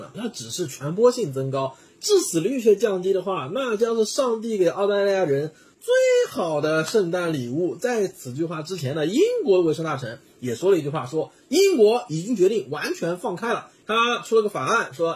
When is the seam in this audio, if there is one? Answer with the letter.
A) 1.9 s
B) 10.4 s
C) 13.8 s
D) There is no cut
C